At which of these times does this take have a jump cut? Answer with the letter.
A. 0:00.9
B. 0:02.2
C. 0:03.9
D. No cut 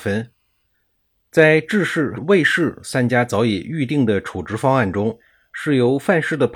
B